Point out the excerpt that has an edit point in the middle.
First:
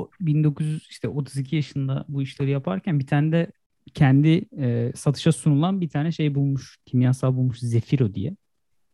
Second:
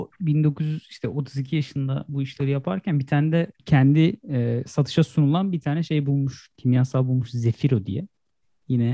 second; 1 cut; at 3.6 s

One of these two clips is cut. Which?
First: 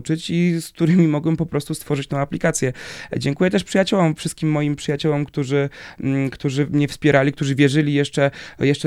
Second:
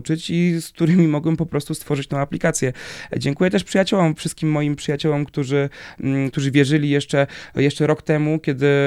second; 1 cut; at 6.3 s

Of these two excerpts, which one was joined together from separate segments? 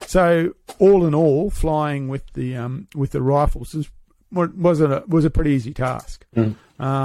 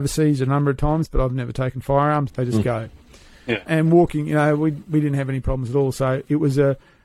second; 2 cuts; at 2.3 s, 3.7 s

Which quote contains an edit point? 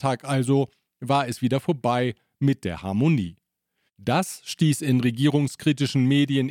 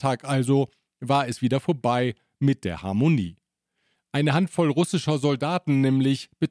first; 1 cut; at 3.9 s

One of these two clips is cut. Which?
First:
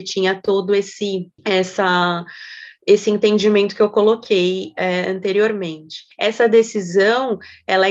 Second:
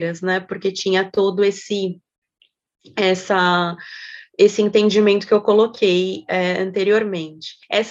first; 1 cut; at 1.4 s

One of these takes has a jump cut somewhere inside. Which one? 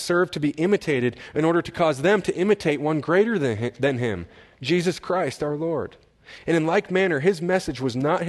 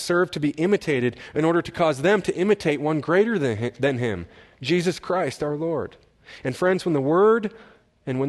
second; 1 cut; at 6.4 s

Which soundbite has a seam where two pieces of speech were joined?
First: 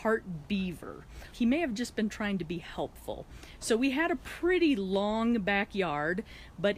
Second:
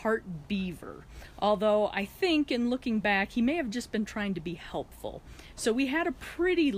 first; 1 cut; at 1.3 s

